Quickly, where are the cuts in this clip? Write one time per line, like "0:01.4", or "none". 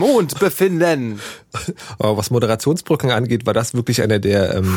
none